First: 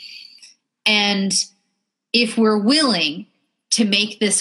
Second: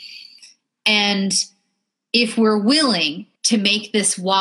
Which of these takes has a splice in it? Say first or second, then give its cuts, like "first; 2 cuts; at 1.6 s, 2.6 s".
second; 1 cut; at 3.3 s